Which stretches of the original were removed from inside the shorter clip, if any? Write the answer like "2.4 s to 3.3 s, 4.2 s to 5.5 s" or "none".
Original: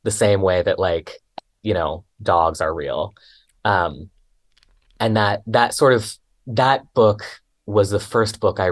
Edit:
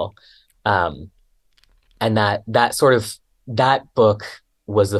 none